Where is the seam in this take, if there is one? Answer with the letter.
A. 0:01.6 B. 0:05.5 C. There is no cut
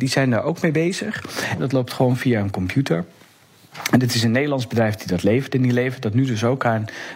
A